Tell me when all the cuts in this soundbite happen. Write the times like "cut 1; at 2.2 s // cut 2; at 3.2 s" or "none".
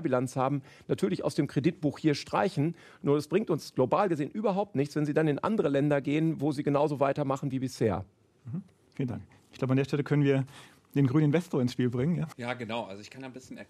cut 1; at 12.3 s